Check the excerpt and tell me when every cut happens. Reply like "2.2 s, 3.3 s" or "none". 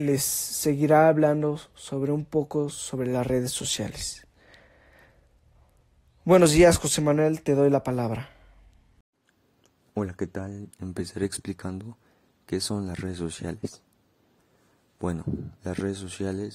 10.7 s